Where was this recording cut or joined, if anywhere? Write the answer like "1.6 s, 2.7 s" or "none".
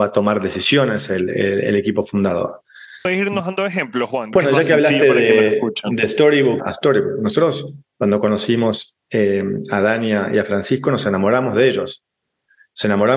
4.3 s, 6.6 s